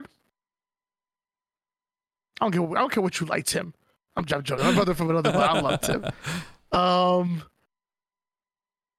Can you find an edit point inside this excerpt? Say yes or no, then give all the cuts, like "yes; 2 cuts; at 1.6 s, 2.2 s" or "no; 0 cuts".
yes; 1 cut; at 4.6 s